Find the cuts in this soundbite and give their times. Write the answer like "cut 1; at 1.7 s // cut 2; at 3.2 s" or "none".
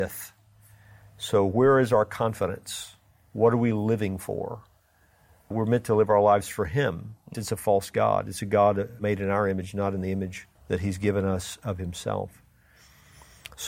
cut 1; at 3.2 s // cut 2; at 7.3 s // cut 3; at 10.6 s